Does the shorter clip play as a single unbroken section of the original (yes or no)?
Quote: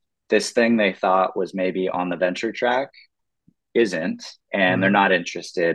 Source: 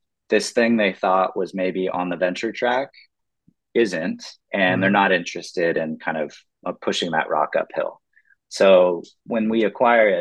yes